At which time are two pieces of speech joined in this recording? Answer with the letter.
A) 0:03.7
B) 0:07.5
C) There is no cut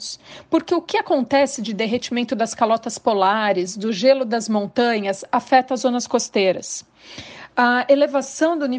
C